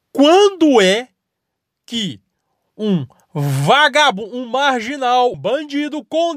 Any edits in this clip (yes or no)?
yes